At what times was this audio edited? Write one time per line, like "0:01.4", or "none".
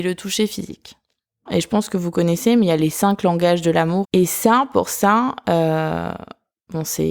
0:01.5
0:04.0